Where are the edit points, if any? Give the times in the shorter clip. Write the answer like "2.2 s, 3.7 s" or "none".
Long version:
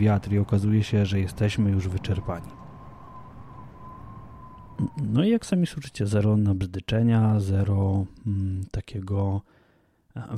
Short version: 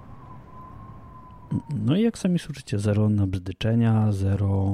none

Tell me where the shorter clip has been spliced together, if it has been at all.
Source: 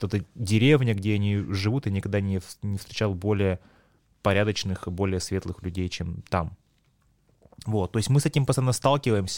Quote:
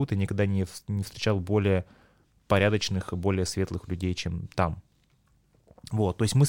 none

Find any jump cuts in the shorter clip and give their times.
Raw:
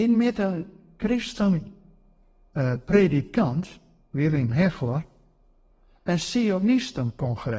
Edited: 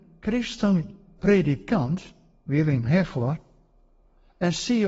1.2 s

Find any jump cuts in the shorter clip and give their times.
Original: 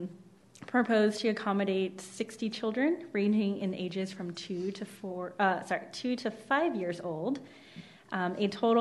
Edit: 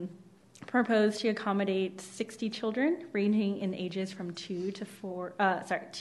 none

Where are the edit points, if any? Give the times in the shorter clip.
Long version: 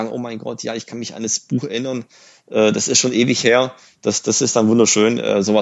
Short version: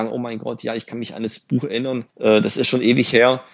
2.1 s

